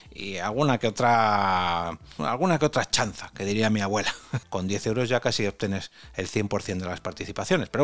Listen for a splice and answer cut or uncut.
cut